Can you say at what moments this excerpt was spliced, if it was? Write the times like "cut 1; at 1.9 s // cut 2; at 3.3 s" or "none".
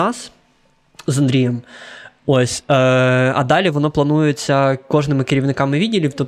none